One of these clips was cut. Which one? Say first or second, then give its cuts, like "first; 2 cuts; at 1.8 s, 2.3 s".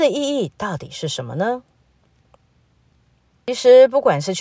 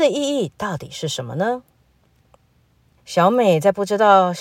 second; 1 cut; at 3.0 s